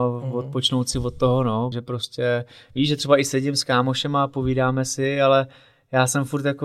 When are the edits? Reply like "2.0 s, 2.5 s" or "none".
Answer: 1.7 s